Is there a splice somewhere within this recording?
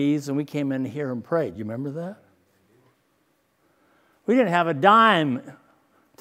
no; 0 cuts

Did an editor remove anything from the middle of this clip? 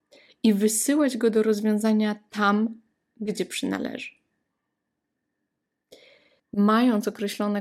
yes; 1 cut; at 6.4 s

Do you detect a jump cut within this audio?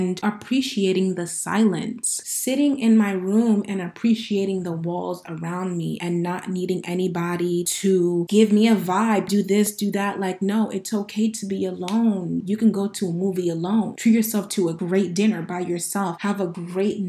yes; 2 cuts; at 9.3 s, 12.4 s

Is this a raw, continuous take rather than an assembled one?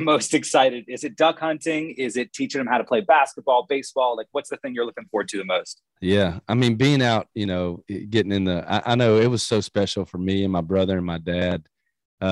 yes; 0 cuts

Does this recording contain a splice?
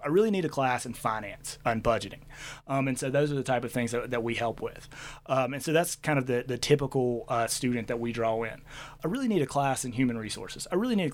yes; 1 cut; at 9.0 s

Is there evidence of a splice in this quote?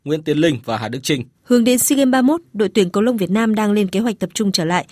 yes; 1 cut; at 1.3 s

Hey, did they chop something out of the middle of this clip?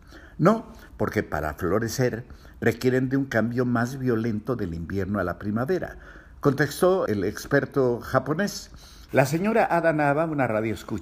yes; 2 cuts; at 7.1 s, 9.1 s

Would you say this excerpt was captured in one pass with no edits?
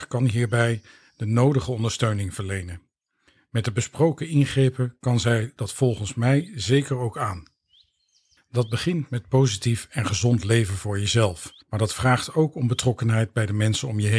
no; 2 cuts; at 8.4 s, 11.6 s

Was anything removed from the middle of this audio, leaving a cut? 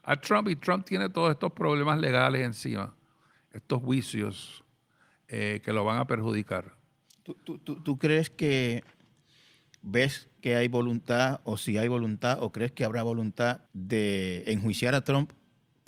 yes; 1 cut; at 13.7 s

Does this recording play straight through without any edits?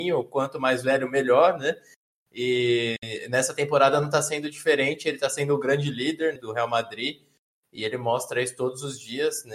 no; 1 cut; at 6.4 s

